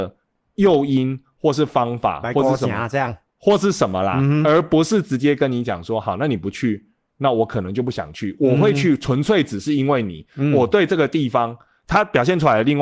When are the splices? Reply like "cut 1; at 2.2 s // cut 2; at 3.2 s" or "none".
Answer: none

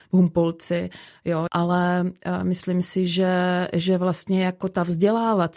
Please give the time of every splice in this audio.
cut 1; at 1.5 s

